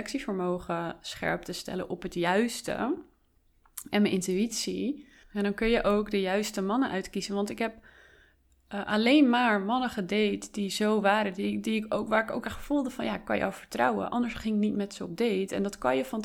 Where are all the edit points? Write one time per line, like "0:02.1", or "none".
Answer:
none